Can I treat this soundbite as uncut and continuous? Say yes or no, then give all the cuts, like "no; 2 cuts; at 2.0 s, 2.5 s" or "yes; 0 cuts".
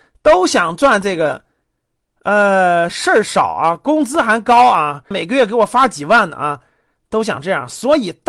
no; 2 cuts; at 2.9 s, 5.1 s